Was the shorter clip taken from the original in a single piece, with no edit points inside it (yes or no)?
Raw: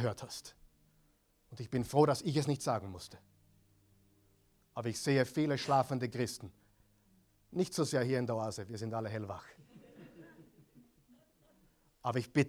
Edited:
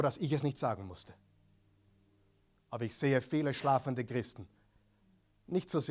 yes